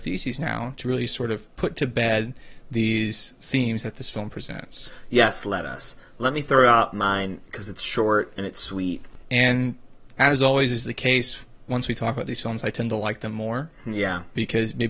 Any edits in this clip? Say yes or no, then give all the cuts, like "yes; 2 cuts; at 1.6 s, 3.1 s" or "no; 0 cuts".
yes; 1 cut; at 9.2 s